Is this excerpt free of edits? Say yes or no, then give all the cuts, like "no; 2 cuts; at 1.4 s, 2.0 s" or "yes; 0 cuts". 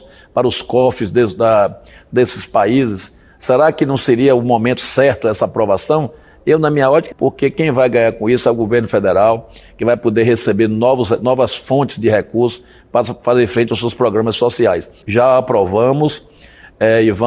no; 2 cuts; at 7.1 s, 15.0 s